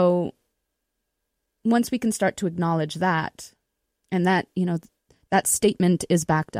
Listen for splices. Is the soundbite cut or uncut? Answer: uncut